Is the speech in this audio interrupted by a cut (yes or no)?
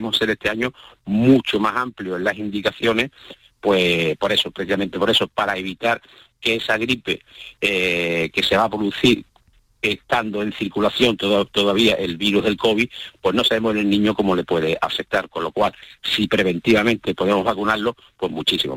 no